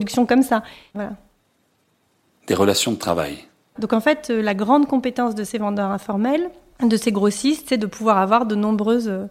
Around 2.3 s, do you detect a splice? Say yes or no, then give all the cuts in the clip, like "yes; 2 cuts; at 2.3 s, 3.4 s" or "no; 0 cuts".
no; 2 cuts; at 0.9 s, 3.8 s